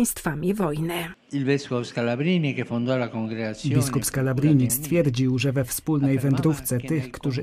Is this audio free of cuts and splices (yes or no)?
no